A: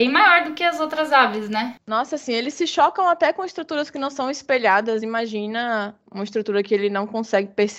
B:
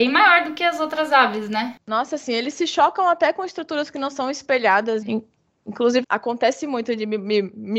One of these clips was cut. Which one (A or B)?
B